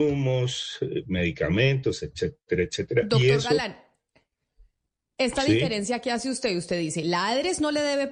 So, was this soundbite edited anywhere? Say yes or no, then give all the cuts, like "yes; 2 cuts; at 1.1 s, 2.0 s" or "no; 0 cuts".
no; 0 cuts